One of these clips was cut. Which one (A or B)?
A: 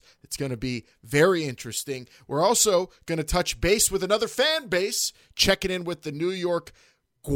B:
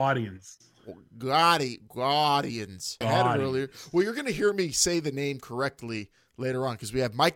B